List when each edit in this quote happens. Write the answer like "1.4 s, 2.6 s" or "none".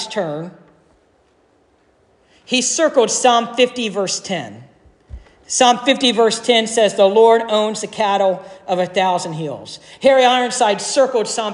none